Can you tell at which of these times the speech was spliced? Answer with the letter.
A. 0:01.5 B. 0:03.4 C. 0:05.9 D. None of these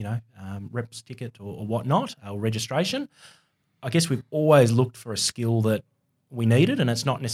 D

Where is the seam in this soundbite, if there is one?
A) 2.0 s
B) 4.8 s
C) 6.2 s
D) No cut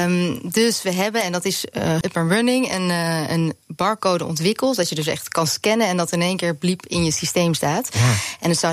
A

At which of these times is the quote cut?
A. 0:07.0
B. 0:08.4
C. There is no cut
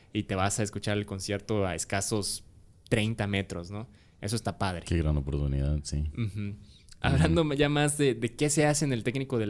A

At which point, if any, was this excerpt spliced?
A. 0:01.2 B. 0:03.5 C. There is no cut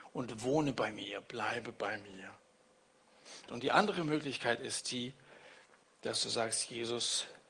B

